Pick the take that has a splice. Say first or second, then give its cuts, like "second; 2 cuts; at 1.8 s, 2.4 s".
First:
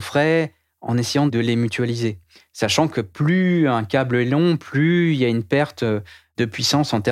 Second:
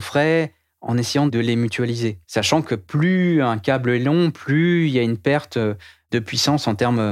second; 1 cut; at 2.2 s